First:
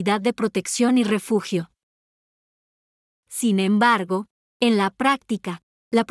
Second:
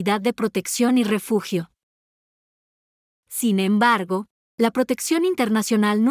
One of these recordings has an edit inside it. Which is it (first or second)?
second